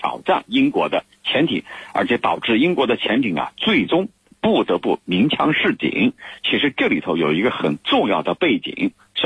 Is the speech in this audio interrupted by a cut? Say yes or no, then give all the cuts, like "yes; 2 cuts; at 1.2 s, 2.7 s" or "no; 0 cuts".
no; 0 cuts